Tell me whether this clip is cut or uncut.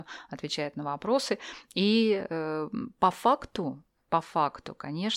uncut